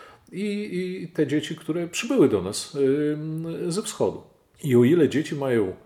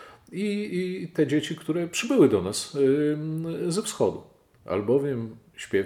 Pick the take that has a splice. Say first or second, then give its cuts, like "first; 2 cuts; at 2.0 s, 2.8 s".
first; 1 cut; at 4.6 s